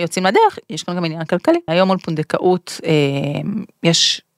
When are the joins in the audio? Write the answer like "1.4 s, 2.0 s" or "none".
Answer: 1.7 s

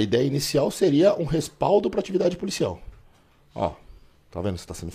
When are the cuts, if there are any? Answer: none

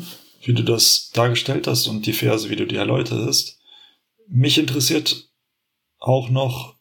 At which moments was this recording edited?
none

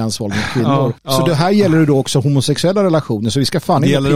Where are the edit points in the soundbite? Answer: 1.0 s

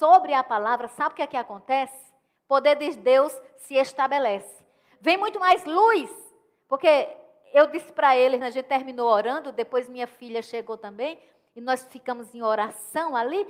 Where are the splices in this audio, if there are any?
8.4 s

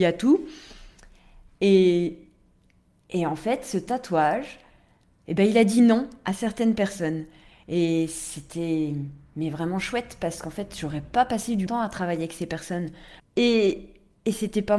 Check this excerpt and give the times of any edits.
11.7 s, 13.2 s

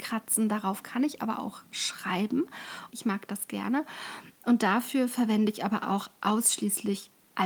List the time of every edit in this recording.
2.9 s

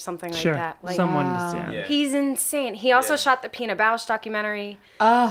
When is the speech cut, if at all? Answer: none

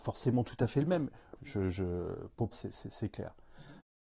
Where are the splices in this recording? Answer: 1.4 s, 2.5 s

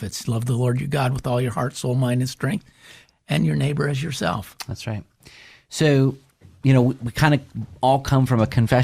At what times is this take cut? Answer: none

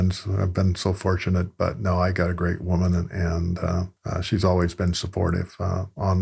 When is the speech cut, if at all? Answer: none

